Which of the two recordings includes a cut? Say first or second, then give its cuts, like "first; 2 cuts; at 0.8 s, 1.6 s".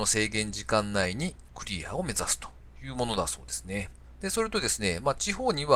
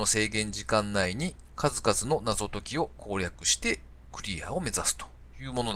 first; 2 cuts; at 1.5 s, 4.2 s